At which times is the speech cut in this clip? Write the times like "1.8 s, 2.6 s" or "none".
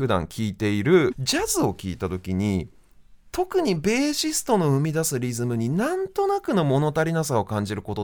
1.1 s